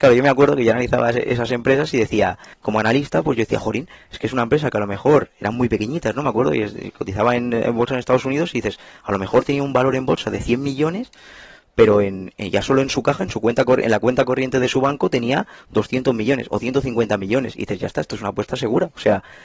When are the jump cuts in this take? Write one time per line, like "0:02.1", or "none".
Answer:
0:02.5